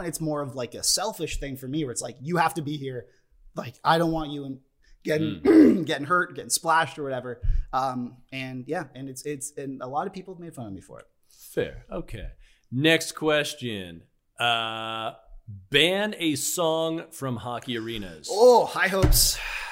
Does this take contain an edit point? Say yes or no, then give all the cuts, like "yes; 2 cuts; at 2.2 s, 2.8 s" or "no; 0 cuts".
no; 0 cuts